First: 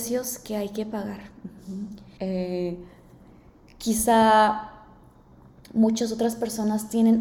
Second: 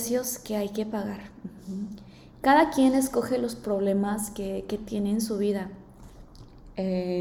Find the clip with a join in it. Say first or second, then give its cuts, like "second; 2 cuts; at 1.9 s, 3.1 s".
first; 1 cut; at 2.2 s